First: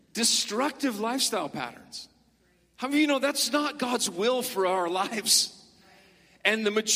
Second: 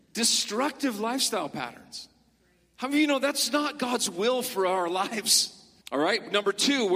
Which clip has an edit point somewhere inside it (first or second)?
second